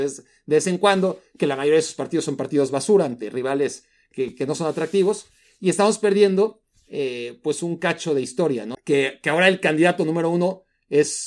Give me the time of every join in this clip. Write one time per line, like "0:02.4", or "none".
0:08.7